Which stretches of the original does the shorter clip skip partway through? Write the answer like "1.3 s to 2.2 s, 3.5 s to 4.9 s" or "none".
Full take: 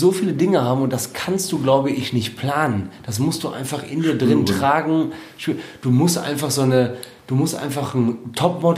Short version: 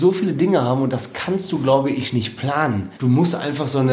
3.0 s to 5.8 s